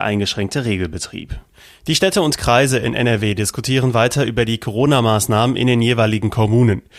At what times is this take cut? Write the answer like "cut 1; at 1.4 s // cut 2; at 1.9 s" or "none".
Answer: none